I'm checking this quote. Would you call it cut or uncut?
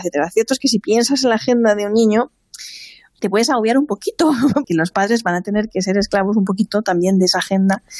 cut